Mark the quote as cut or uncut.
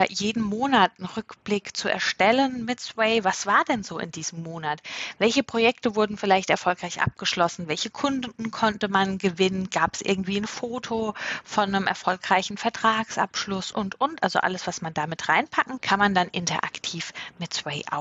cut